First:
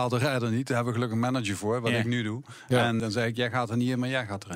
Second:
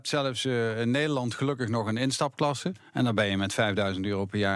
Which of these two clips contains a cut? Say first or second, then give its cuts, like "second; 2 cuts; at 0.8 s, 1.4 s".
first; 1 cut; at 3.0 s